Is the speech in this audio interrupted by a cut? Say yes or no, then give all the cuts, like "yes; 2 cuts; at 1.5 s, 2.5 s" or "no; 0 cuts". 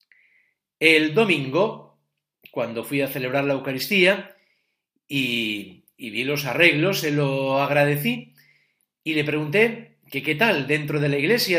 no; 0 cuts